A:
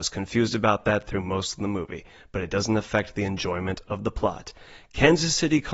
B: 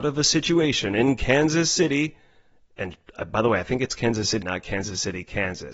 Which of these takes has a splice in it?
B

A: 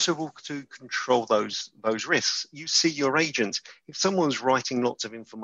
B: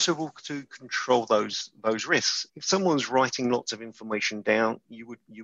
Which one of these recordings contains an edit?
B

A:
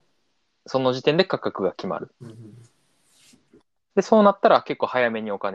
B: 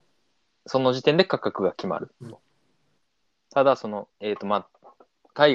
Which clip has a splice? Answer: B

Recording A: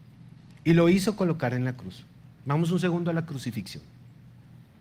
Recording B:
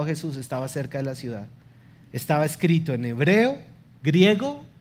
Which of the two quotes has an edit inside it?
A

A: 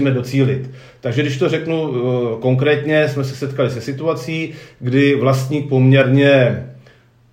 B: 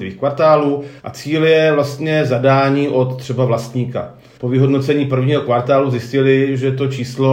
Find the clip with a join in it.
B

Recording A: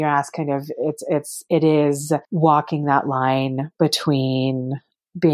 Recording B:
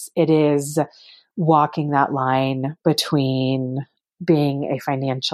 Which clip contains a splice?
A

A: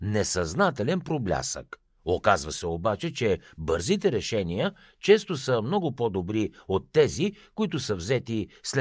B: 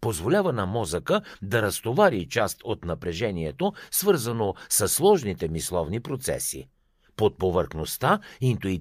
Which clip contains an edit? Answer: A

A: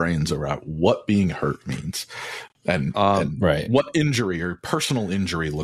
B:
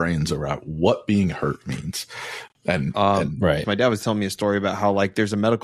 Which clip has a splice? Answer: B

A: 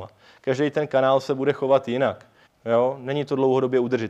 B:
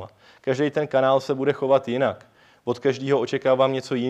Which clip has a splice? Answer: A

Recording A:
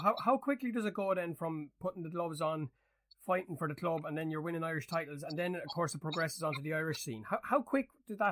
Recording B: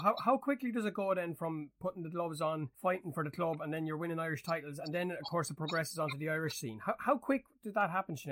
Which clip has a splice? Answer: B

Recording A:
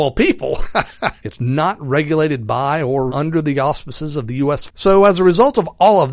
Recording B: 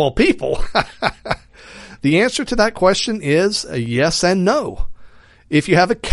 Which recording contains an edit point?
A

